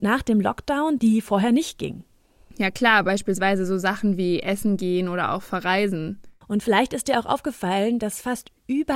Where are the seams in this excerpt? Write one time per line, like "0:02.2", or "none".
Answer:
0:01.0
0:06.4